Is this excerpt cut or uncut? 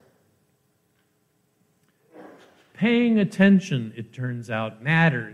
uncut